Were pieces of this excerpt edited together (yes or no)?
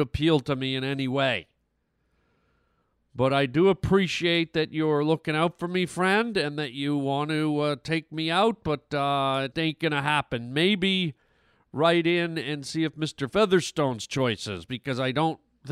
yes